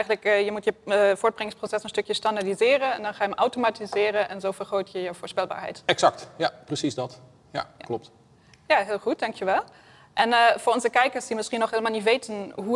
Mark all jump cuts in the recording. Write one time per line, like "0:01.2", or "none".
none